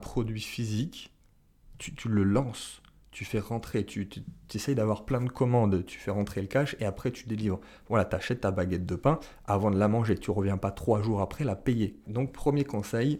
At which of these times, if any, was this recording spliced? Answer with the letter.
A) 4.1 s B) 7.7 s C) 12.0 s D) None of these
C